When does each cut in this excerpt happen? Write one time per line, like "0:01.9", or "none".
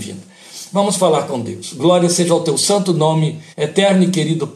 0:03.5

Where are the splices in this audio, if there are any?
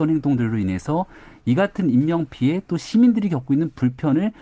none

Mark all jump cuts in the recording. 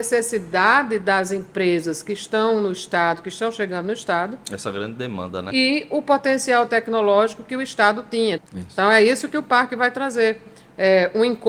0:05.5
0:08.4

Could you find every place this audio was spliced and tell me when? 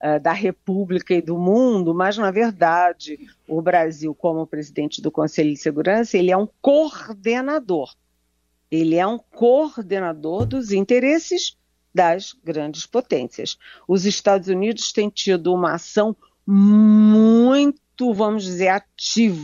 none

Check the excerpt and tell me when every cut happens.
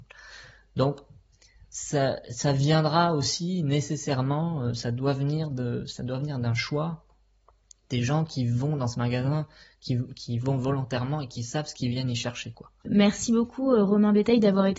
0:12.5

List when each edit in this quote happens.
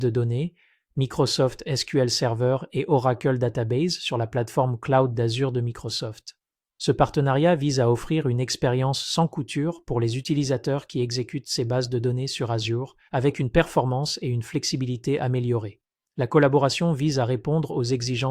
0:13.1

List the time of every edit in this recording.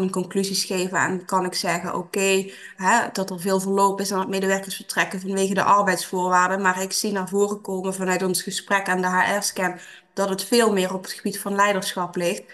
0:02.7

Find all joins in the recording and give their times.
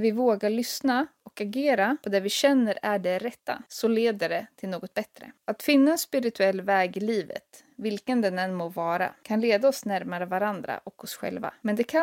0:05.4

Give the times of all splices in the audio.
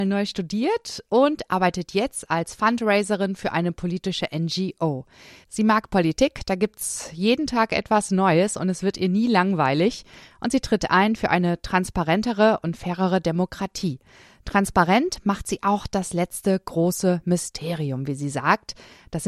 none

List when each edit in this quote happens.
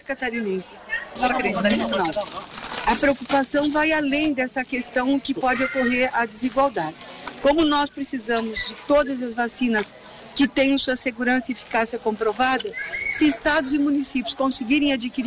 0:01.2

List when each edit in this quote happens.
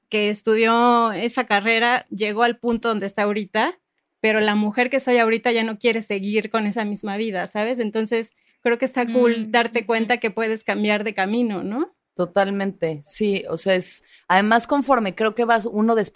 0:12.1

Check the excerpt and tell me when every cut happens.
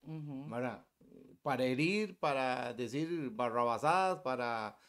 none

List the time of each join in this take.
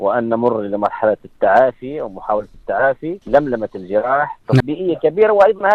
0:03.2
0:04.6

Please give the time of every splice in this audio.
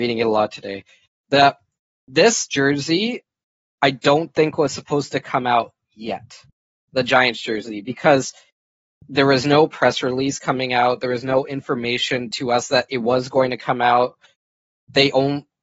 none

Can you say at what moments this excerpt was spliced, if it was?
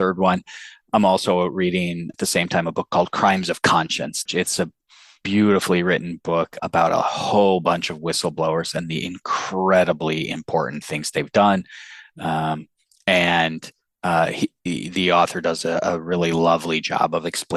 0:04.3
0:06.6

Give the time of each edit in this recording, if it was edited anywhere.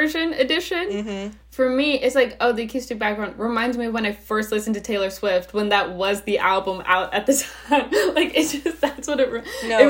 none

